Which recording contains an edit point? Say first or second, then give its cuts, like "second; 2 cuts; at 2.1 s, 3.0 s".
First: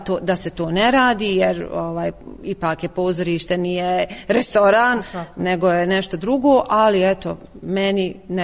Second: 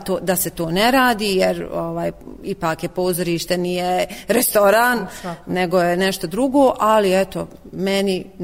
first; 1 cut; at 5.0 s